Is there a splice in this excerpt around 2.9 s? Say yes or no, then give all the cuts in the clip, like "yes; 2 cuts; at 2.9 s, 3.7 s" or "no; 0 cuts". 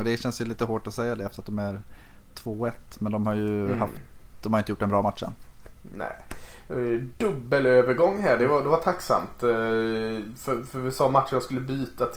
no; 0 cuts